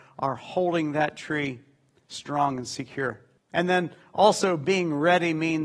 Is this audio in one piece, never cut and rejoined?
no; 1 cut; at 3.4 s

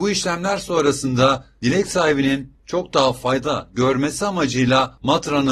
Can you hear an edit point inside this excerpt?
no; 0 cuts

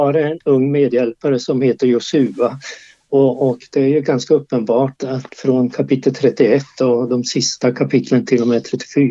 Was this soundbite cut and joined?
yes; 1 cut; at 5.0 s

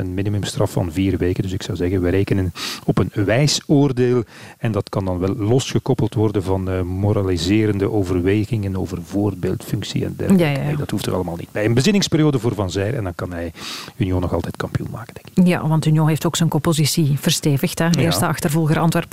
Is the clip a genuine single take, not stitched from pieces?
yes; 0 cuts

